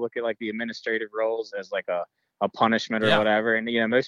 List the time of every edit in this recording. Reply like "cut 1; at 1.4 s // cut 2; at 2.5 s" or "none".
cut 1; at 1.5 s